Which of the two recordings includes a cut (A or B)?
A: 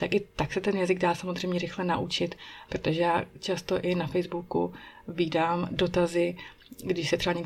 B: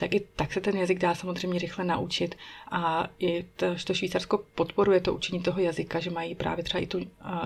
A